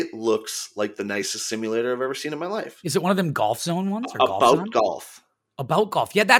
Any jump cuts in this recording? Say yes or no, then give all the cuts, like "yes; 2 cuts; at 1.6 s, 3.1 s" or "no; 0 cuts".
no; 0 cuts